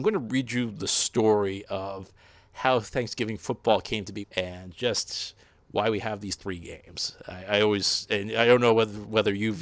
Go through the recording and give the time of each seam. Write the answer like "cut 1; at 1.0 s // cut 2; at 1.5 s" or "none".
cut 1; at 4.2 s